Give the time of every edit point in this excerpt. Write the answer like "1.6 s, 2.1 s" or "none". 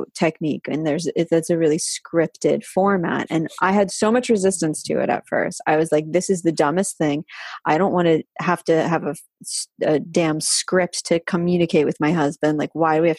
none